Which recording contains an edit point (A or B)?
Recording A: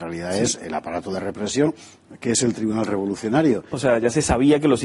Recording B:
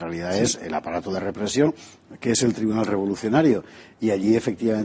A